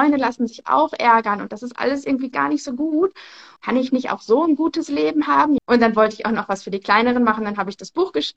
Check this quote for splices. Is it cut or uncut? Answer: cut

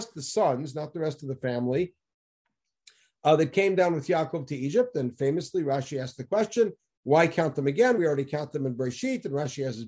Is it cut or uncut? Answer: uncut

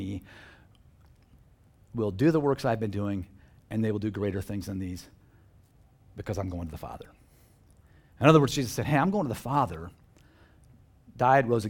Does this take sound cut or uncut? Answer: uncut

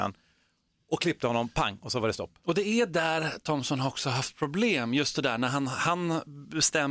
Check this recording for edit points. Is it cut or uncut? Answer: uncut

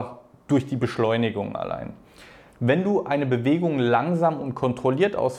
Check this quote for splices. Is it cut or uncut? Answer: cut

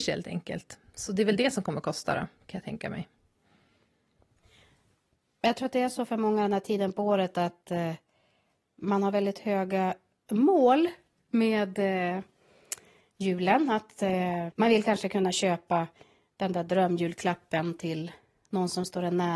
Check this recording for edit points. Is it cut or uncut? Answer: uncut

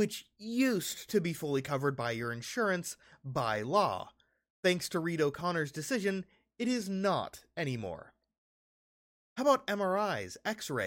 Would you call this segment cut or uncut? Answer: uncut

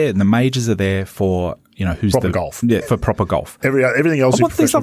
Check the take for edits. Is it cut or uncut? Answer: cut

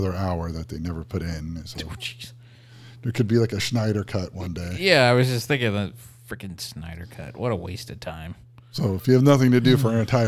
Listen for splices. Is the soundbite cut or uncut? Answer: uncut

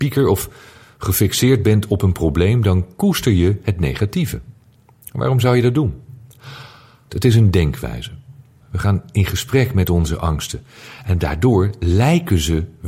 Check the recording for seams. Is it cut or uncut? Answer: cut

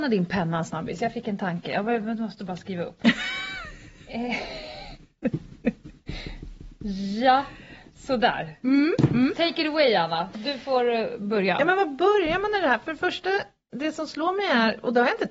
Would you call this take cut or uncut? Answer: uncut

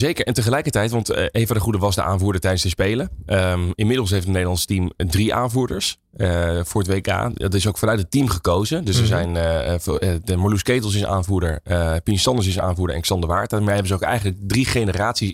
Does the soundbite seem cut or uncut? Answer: uncut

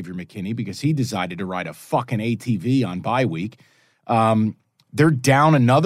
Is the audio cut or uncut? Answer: uncut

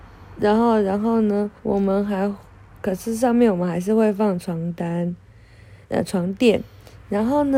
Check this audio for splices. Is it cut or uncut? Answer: cut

